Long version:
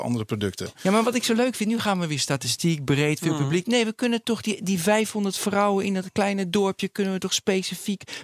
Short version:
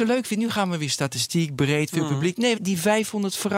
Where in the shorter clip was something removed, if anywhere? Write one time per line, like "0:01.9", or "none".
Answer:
0:02.6